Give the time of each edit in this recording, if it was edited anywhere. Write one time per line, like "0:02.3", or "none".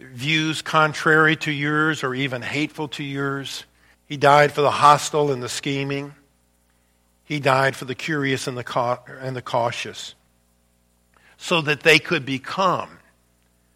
0:03.9